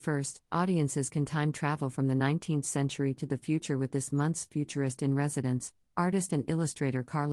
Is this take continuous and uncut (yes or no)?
yes